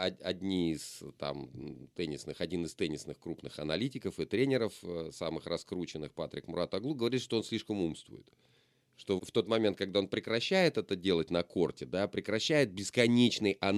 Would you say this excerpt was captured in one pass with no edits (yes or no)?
no